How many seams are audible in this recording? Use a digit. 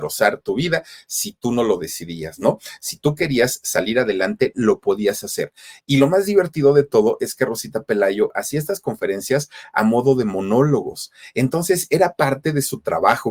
0